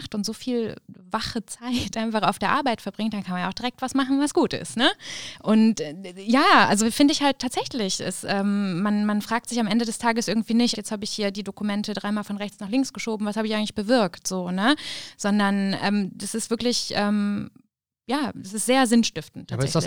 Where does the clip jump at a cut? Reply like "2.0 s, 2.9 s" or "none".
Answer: 10.7 s